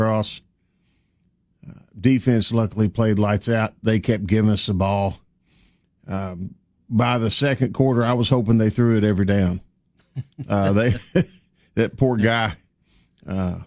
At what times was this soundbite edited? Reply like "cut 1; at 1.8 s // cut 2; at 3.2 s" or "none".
none